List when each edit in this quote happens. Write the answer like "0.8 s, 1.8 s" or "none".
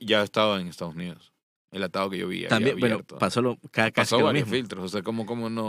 none